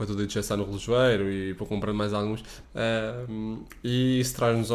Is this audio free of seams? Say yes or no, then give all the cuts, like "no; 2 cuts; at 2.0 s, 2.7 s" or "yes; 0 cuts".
no; 1 cut; at 2.6 s